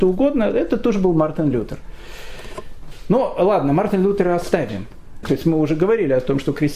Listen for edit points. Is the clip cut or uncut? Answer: cut